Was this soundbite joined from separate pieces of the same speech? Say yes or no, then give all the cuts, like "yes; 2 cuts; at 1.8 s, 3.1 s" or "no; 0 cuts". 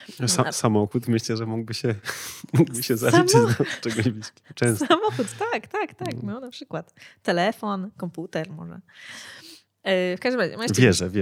no; 0 cuts